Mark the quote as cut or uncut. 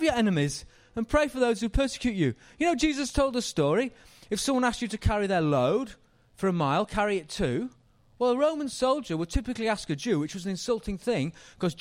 uncut